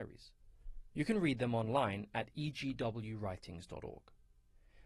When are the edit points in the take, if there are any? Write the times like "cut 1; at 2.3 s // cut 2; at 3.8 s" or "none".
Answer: none